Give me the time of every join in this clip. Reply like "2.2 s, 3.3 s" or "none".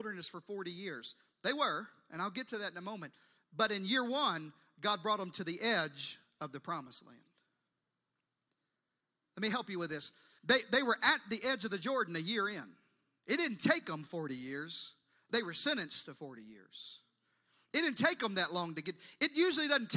10.4 s